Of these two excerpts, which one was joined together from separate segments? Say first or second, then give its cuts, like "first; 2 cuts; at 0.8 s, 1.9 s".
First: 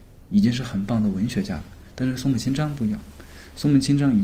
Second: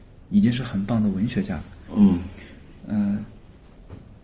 second; 1 cut; at 1.9 s